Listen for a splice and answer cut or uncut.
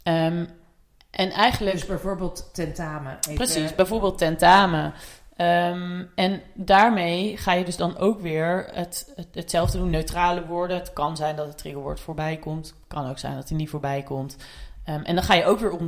uncut